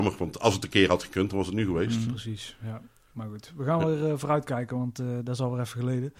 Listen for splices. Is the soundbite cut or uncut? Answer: uncut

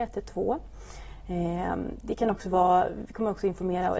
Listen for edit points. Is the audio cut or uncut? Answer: uncut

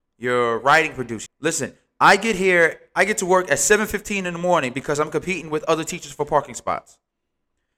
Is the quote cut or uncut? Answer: cut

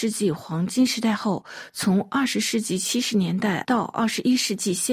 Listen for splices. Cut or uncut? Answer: uncut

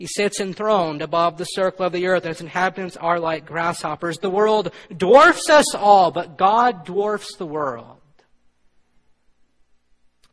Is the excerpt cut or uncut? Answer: uncut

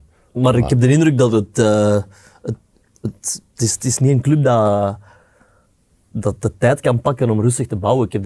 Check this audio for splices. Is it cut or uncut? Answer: cut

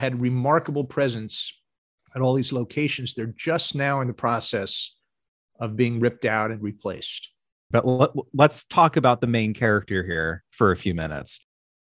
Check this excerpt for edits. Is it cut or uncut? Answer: cut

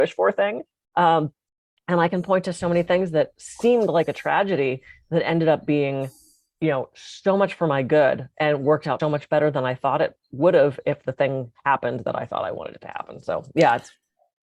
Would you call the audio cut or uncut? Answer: cut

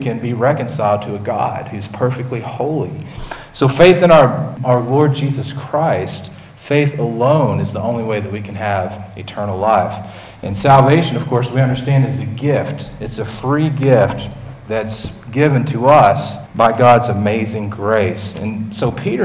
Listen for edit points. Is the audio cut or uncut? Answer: uncut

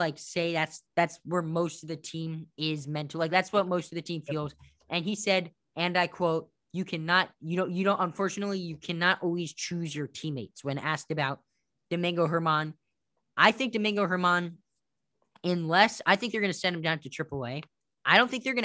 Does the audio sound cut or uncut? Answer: uncut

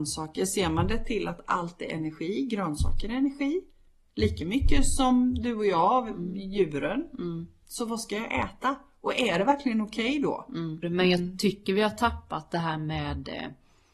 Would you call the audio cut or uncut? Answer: cut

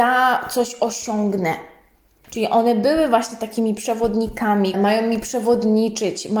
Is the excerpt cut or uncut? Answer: cut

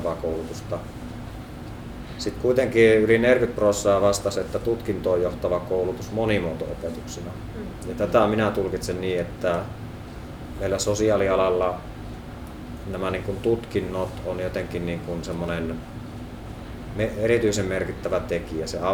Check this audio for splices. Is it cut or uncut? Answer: uncut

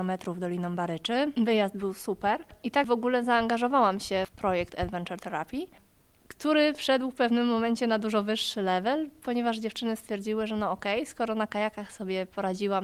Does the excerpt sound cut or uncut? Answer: uncut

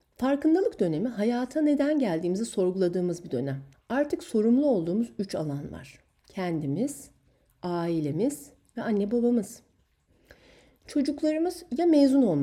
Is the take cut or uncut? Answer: cut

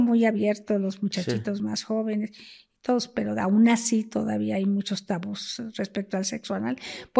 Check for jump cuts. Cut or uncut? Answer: uncut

